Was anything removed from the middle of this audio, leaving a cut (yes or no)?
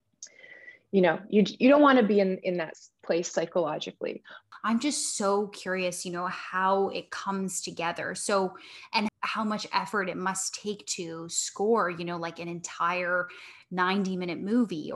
yes